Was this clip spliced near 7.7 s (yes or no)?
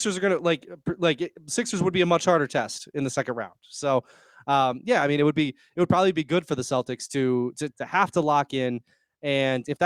yes